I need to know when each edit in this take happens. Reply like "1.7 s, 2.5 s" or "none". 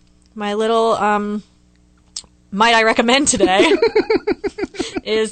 none